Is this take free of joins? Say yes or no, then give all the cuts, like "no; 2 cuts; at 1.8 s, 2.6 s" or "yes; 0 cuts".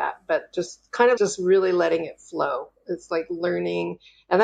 no; 1 cut; at 1.2 s